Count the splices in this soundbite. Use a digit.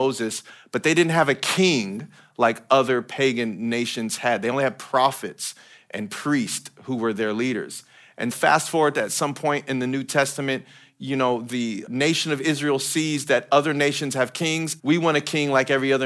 3